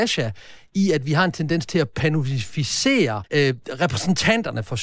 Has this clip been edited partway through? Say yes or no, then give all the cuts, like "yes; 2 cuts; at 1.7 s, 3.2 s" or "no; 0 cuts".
yes; 1 cut; at 3.2 s